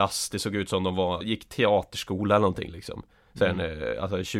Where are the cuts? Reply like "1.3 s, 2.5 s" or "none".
1.2 s